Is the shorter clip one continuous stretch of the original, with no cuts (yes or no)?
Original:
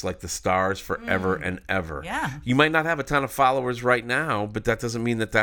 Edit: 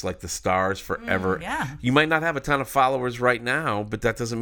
no